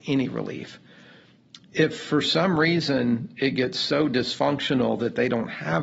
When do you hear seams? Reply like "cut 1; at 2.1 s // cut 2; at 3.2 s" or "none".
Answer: none